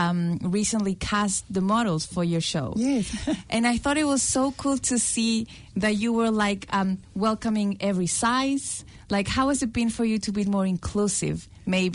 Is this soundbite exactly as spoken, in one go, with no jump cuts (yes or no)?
yes